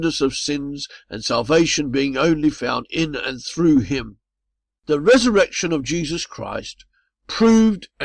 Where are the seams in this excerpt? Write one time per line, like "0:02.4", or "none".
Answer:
0:04.8